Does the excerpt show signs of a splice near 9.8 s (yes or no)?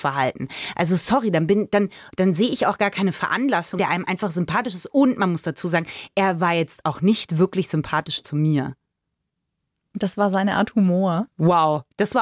no